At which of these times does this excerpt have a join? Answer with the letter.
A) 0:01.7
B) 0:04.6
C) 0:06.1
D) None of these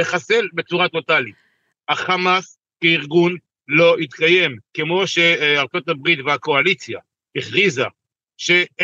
A